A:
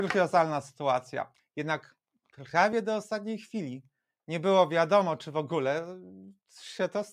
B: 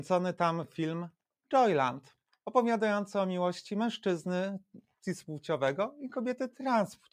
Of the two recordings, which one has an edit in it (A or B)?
A